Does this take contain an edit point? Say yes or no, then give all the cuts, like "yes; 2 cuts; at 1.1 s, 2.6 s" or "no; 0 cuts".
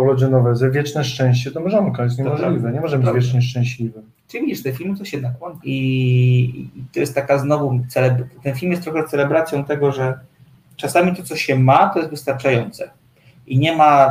yes; 1 cut; at 5.6 s